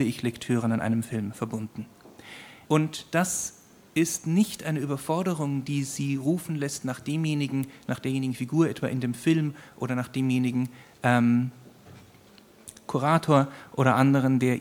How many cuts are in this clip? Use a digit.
1